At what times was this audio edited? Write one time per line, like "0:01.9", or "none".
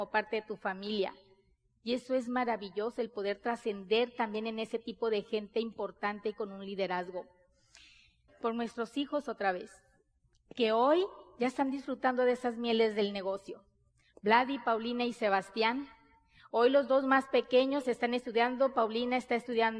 0:08.3